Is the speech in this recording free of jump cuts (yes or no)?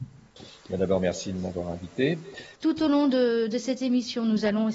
no